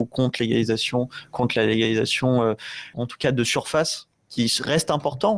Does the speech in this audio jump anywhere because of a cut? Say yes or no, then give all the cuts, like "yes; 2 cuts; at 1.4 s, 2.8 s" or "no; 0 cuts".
yes; 1 cut; at 2.9 s